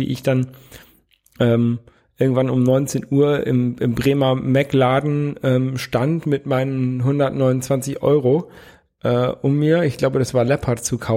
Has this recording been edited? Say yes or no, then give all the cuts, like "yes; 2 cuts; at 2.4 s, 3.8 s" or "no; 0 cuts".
no; 0 cuts